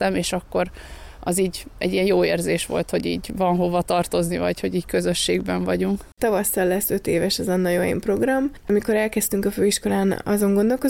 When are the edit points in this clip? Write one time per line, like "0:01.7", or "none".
0:06.1
0:08.6